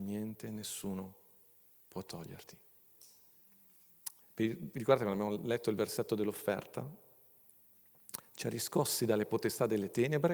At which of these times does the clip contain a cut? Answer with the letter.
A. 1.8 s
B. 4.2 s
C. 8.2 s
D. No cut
B